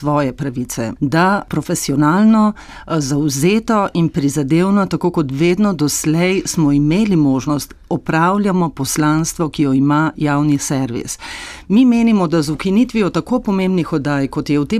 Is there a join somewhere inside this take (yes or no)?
yes